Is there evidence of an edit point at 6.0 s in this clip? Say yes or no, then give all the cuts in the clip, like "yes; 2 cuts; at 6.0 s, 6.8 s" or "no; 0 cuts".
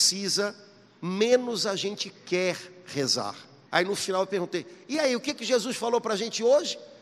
no; 1 cut; at 3.7 s